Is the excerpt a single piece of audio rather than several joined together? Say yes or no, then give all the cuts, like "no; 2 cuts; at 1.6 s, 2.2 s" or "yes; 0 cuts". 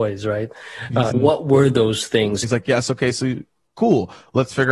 no; 2 cuts; at 1.1 s, 2.4 s